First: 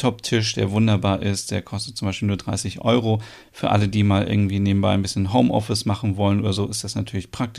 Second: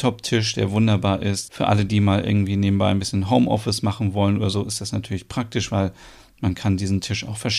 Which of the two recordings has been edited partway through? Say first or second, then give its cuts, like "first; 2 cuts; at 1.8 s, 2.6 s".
second; 1 cut; at 1.4 s